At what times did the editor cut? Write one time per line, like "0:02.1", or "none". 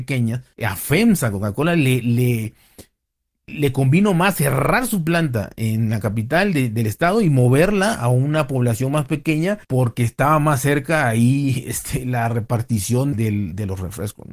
0:09.6
0:13.1